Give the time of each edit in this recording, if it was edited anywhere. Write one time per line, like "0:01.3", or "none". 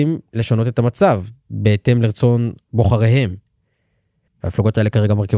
0:04.3